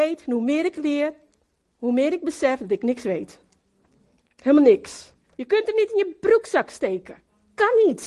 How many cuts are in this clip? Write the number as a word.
one